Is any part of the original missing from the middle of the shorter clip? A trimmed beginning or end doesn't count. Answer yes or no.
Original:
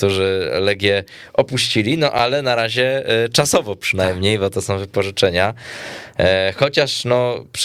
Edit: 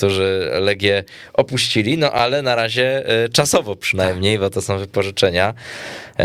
no